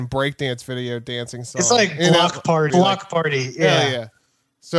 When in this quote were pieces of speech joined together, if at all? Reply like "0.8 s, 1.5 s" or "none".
2.7 s